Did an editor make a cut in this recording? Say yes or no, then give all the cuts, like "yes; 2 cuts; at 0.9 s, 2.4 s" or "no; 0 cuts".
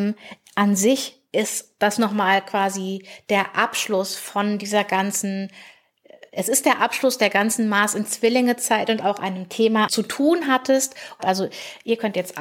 yes; 2 cuts; at 9.9 s, 11.2 s